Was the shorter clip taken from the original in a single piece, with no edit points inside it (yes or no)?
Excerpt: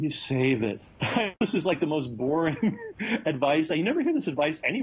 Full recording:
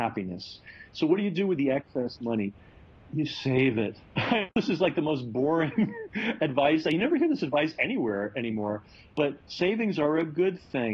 yes